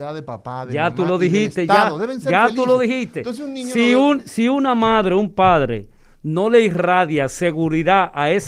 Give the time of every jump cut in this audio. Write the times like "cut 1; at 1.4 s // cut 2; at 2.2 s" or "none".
none